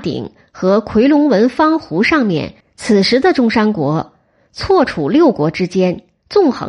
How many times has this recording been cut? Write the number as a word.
one